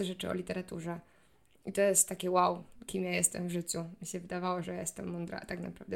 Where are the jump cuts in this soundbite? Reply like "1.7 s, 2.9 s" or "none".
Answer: none